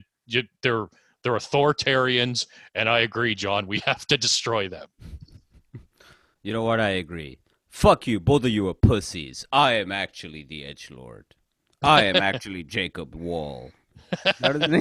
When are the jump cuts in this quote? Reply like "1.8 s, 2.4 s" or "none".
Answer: none